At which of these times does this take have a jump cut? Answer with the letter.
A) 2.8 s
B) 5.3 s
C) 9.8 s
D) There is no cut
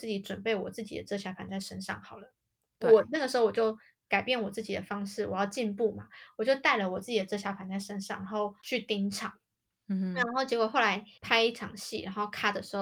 D